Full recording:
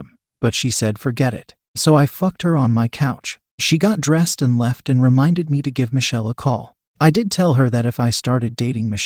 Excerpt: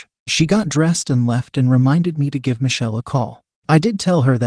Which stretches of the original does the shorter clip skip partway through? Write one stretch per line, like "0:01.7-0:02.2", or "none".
none